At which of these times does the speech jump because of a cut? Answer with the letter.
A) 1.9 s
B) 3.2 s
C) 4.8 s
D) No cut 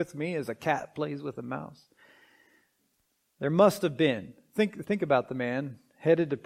C